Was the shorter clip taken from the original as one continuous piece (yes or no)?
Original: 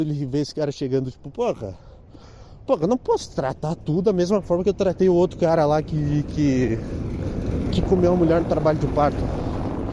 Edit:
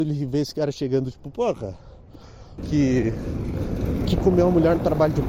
no